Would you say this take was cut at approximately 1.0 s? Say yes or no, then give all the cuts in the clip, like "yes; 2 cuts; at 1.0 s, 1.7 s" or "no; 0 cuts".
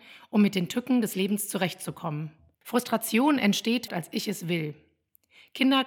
no; 2 cuts; at 2.5 s, 3.9 s